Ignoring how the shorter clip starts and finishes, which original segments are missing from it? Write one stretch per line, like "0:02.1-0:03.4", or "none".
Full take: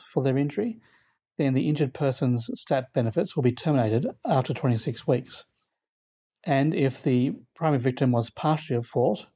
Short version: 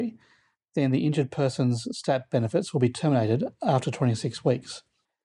none